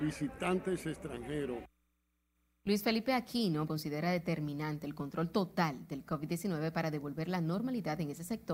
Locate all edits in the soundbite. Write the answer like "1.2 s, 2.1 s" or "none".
3.7 s